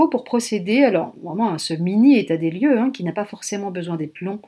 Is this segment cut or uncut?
uncut